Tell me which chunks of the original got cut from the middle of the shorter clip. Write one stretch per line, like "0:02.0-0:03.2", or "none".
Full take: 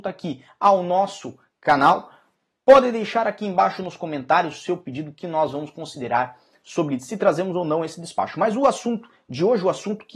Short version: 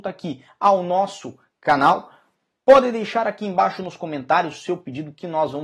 none